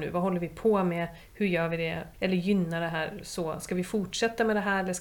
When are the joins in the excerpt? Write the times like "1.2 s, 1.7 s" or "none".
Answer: 2.1 s